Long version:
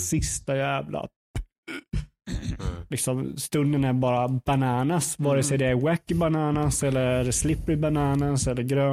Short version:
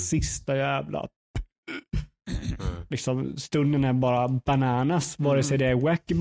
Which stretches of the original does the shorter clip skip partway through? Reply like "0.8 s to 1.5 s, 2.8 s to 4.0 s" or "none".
none